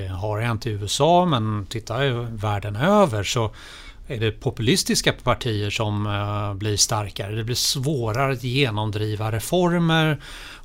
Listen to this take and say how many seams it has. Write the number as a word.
zero